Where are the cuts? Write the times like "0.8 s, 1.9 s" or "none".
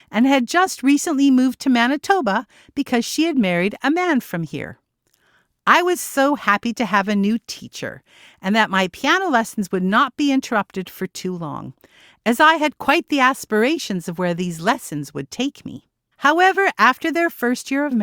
16.1 s

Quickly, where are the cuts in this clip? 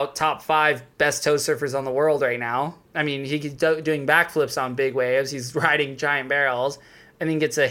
2.8 s

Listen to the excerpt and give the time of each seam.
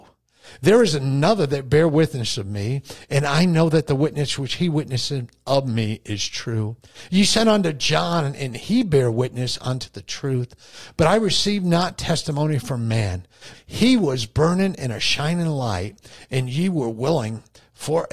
13.5 s

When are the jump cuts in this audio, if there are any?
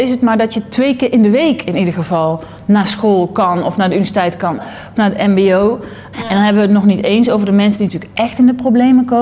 4.6 s, 6.1 s

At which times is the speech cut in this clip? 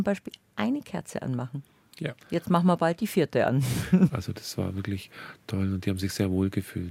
2.2 s, 4.1 s

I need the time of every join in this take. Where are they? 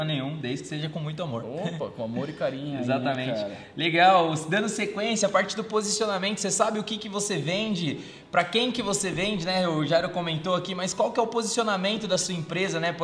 none

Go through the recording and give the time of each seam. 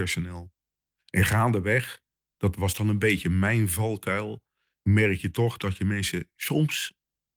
none

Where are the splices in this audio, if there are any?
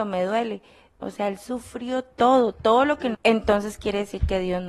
1.0 s, 3.1 s

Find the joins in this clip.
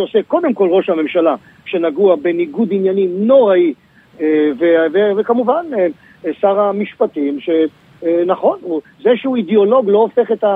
none

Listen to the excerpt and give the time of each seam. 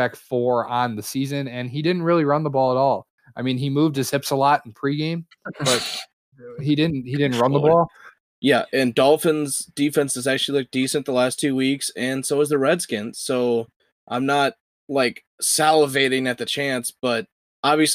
8.3 s

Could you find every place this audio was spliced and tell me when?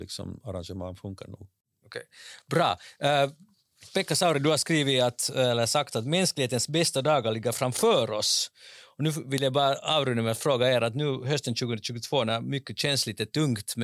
none

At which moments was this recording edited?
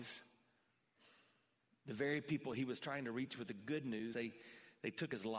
4.1 s

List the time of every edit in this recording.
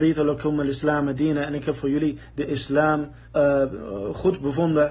3.2 s

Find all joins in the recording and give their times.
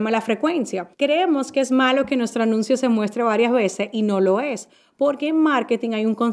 0.9 s

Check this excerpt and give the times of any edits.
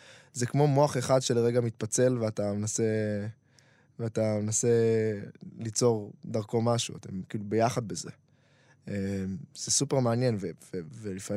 none

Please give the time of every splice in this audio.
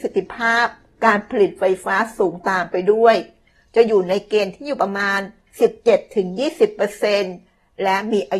none

